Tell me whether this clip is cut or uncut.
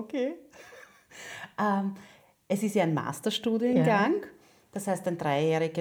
uncut